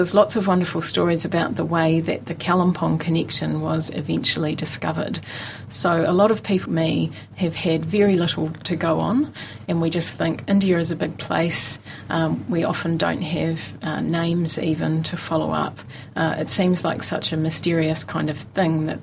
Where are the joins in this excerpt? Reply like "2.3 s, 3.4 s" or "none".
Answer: 6.6 s